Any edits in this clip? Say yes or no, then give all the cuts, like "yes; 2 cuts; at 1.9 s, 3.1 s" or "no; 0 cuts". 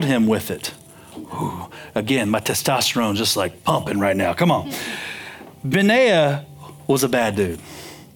no; 0 cuts